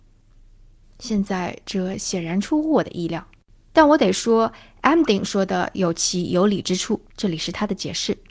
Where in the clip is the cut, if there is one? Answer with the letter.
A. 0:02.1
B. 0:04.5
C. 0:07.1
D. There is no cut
C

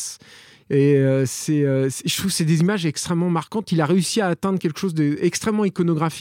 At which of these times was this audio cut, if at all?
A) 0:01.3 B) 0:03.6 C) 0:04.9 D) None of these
D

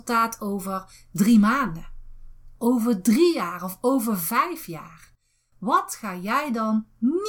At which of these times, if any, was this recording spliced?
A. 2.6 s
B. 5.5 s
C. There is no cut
A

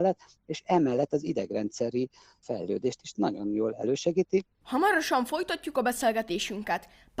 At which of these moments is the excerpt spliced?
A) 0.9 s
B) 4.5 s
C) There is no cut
B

